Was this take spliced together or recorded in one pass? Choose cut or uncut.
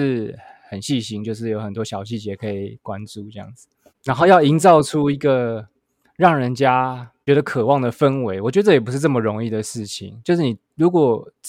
uncut